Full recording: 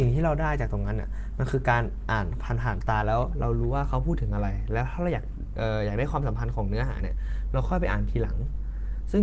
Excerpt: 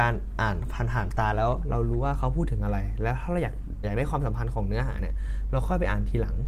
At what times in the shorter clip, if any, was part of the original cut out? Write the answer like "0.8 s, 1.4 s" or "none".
3.8 s